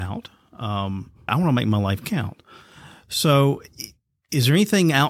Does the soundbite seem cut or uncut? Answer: cut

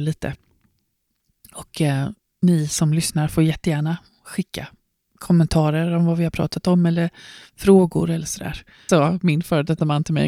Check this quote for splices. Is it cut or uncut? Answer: cut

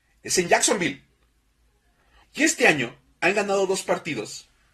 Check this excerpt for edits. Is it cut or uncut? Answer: cut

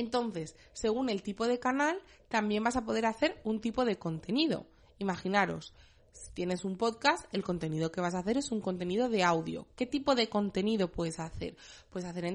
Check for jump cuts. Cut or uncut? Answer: uncut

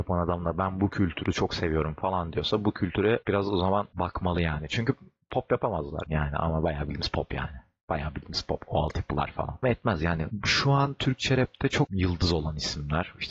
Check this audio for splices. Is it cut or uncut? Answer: cut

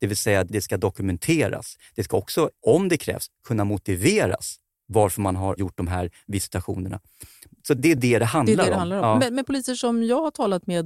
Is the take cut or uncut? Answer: uncut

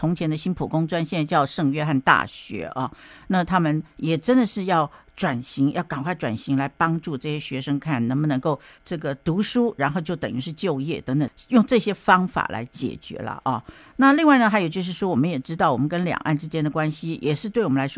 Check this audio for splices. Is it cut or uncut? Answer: uncut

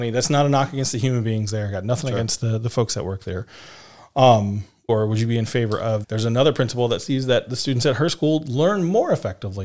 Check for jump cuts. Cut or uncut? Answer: cut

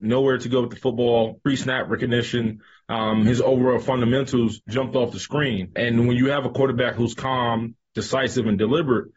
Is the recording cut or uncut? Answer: uncut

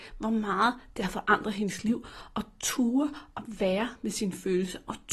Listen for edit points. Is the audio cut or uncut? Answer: uncut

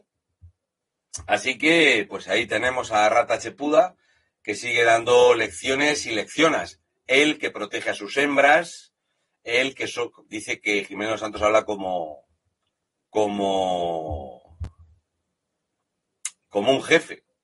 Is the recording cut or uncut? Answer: uncut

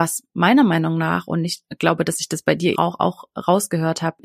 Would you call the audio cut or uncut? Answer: cut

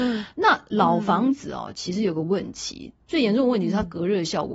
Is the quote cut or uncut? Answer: cut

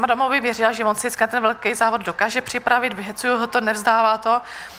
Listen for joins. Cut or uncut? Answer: uncut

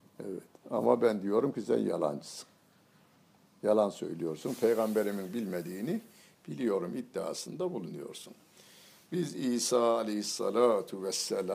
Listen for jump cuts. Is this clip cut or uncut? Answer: uncut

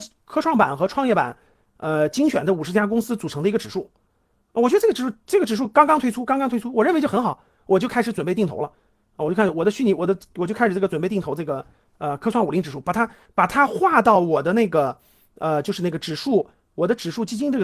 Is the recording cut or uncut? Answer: uncut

